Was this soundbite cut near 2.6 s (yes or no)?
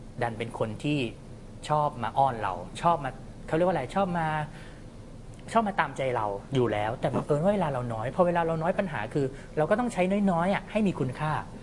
no